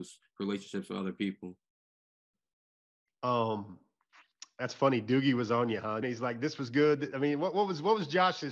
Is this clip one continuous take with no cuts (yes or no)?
no